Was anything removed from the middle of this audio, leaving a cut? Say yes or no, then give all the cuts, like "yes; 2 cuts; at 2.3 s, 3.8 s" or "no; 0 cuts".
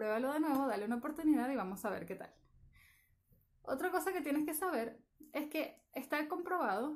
no; 0 cuts